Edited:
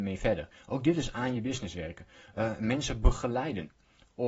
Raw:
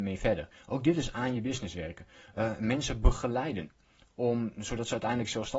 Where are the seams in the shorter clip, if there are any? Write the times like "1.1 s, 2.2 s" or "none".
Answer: none

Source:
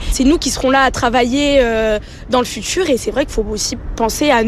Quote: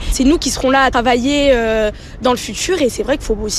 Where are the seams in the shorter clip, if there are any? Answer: 0.9 s

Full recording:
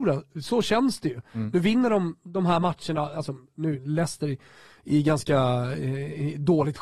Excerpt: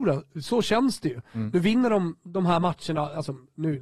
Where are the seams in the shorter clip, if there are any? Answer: none

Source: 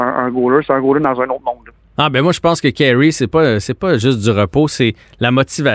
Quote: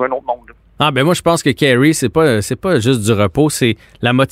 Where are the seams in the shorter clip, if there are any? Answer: none

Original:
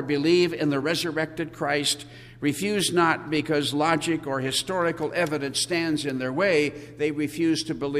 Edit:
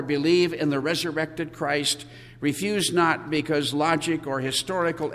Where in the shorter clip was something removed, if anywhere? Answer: none

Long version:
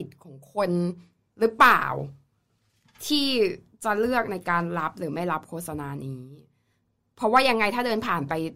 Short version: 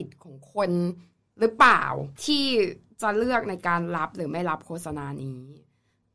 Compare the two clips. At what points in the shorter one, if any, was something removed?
2.2 s

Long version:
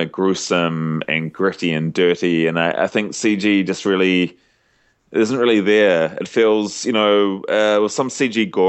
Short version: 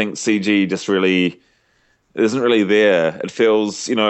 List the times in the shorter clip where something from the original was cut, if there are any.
none

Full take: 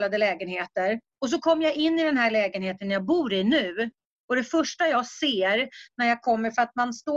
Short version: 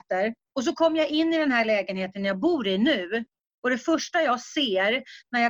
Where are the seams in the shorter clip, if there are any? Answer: none

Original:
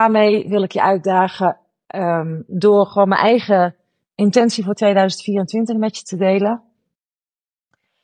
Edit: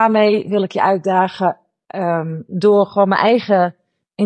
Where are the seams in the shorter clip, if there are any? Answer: none

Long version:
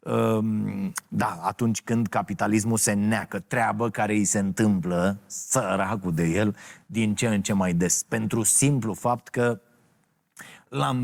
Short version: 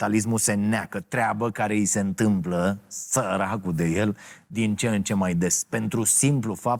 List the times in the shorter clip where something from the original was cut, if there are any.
none

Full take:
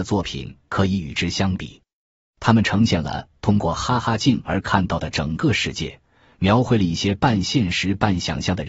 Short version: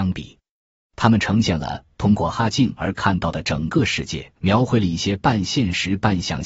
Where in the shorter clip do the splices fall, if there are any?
2.3 s, 4.4 s

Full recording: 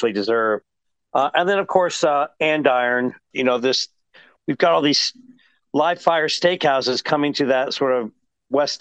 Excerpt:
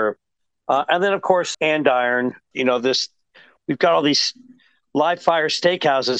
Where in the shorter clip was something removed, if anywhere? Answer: 1.5 s

